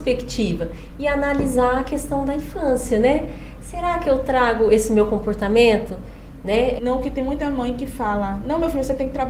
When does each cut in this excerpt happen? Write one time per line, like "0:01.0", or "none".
0:06.8